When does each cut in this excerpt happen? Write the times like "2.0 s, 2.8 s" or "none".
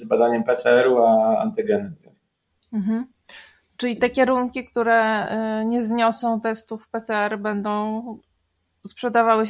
none